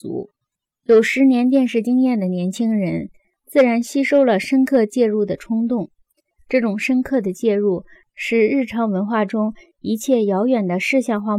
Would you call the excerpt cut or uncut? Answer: uncut